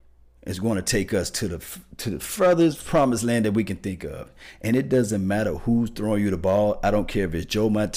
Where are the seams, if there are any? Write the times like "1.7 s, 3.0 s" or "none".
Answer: none